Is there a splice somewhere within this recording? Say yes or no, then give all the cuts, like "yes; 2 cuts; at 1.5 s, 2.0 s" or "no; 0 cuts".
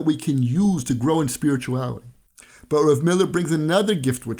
no; 0 cuts